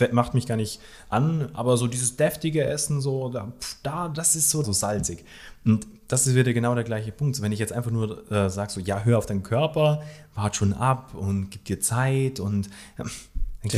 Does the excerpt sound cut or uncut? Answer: cut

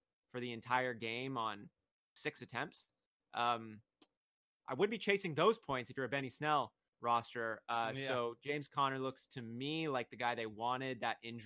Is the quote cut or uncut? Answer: uncut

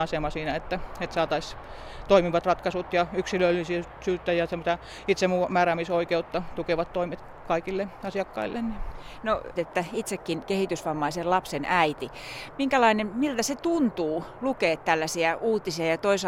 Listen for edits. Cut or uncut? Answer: cut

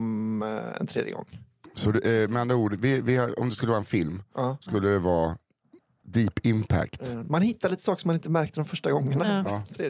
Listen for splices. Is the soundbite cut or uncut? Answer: uncut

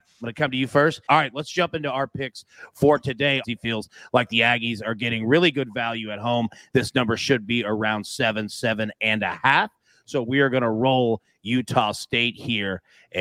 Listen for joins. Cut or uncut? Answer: cut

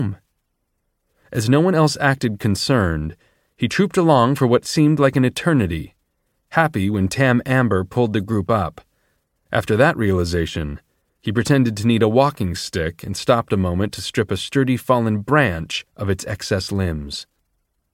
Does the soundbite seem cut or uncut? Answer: cut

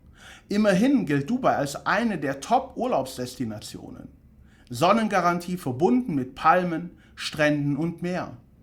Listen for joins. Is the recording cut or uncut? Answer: uncut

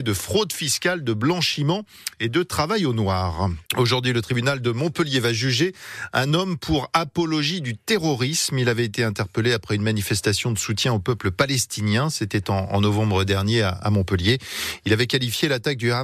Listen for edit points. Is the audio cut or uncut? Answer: cut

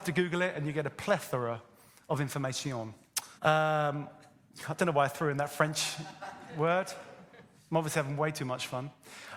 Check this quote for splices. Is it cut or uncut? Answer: cut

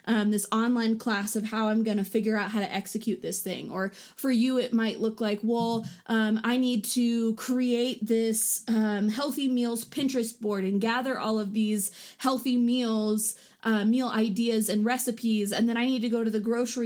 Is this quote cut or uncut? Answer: uncut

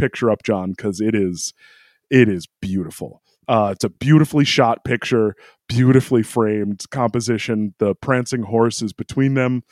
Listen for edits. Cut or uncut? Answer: uncut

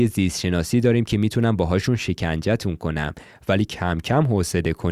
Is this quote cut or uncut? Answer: uncut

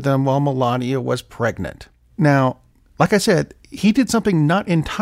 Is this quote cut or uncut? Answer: uncut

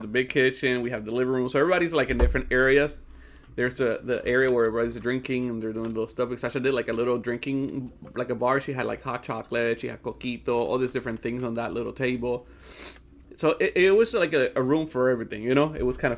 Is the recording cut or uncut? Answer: uncut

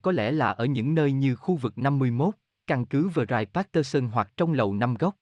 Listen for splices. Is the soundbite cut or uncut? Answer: uncut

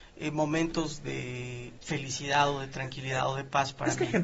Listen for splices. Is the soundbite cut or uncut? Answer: cut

